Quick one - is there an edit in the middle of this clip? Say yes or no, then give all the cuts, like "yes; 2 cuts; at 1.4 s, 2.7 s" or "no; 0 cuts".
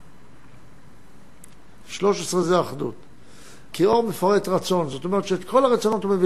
yes; 2 cuts; at 1.8 s, 3.7 s